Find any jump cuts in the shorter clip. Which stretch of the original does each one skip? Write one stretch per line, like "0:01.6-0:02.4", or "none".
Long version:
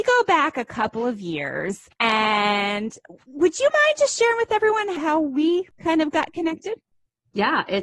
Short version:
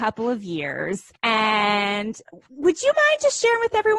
none